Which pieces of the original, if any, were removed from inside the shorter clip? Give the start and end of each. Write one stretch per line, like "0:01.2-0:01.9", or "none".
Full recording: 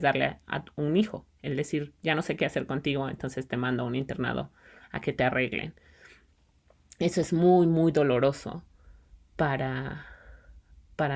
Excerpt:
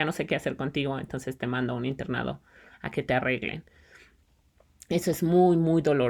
none